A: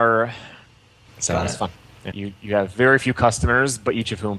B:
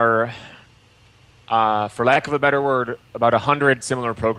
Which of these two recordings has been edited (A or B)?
A